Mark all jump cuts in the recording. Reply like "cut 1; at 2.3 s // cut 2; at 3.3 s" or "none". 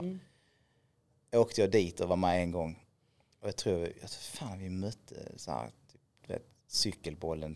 none